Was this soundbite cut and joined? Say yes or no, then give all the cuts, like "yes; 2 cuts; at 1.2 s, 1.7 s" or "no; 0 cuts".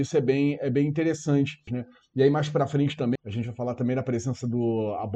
yes; 2 cuts; at 1.7 s, 3.2 s